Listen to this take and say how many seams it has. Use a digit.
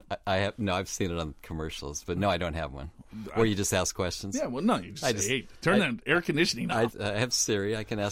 1